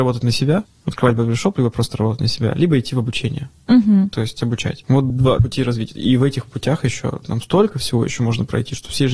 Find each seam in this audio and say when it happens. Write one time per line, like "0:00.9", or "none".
none